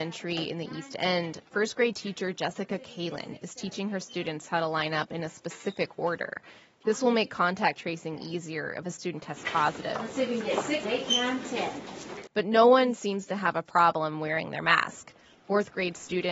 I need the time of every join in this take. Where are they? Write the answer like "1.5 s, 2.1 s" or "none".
10.8 s, 12.3 s